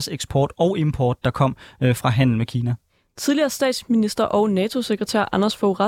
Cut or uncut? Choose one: uncut